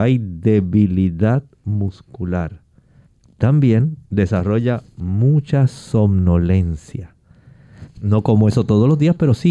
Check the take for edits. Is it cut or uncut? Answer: cut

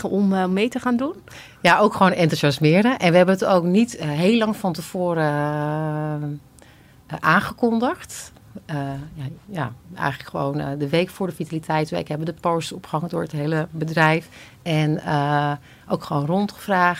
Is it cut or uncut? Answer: uncut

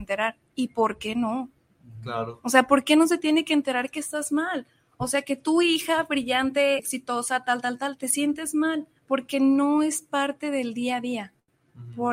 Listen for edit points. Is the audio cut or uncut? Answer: cut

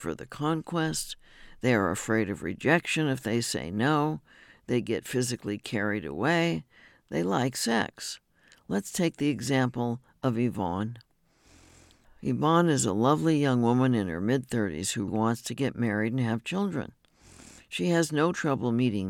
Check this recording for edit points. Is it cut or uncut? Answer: cut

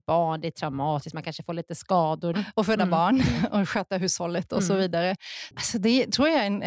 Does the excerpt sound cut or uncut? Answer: cut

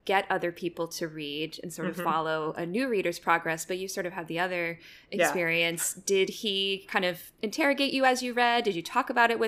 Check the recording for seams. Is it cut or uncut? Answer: uncut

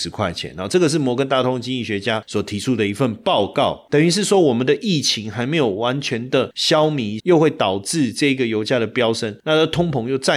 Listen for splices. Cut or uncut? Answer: cut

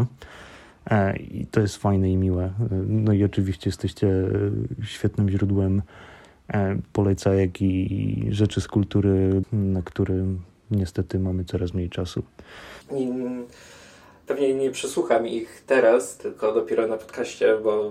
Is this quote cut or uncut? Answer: cut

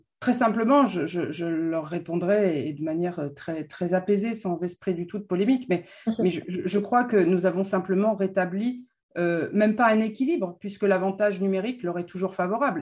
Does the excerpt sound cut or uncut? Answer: uncut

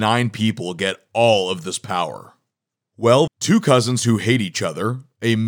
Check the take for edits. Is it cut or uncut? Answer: cut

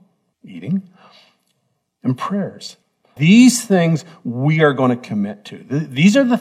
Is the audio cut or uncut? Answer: cut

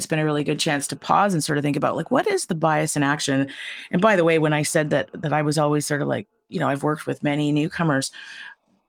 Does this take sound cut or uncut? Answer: uncut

